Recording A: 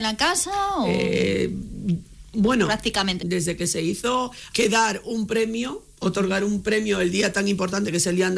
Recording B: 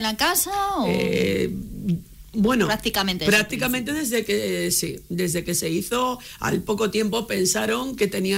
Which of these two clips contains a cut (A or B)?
A